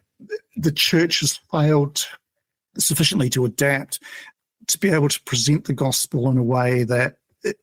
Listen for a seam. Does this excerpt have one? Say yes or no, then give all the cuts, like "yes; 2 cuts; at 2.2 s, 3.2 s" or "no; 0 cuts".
no; 0 cuts